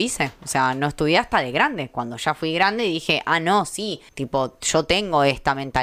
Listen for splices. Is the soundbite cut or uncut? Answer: cut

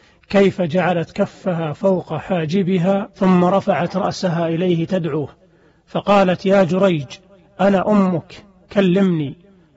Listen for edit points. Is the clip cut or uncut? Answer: uncut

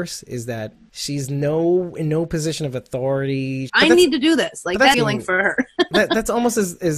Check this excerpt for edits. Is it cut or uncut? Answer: cut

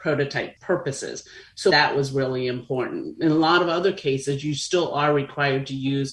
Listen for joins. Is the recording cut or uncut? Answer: cut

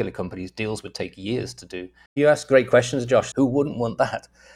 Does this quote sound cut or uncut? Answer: cut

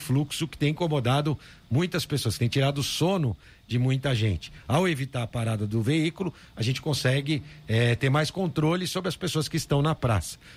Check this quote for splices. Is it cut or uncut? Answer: uncut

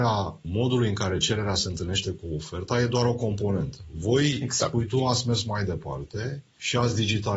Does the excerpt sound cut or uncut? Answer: uncut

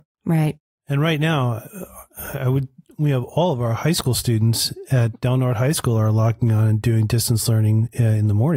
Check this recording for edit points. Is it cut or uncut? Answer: uncut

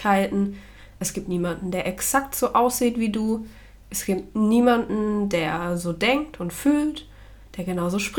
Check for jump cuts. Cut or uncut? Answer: uncut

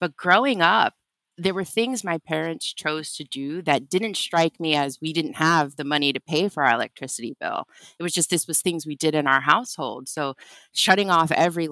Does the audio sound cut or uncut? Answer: uncut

